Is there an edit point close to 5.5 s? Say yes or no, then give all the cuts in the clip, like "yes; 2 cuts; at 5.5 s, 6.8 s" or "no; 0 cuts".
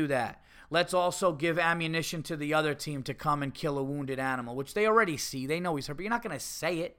no; 0 cuts